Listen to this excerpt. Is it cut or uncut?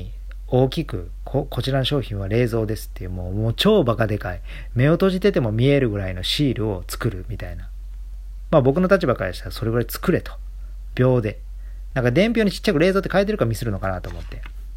cut